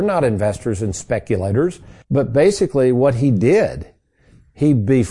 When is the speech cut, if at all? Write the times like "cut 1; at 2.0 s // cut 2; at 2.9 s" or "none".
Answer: cut 1; at 2.0 s